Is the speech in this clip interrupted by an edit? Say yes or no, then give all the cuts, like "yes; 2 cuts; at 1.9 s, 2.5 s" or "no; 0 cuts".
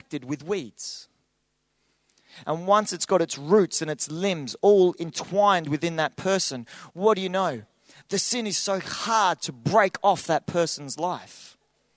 yes; 1 cut; at 2.4 s